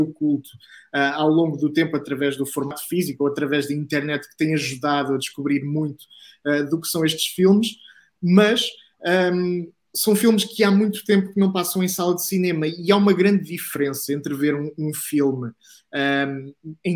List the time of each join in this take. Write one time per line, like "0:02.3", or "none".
none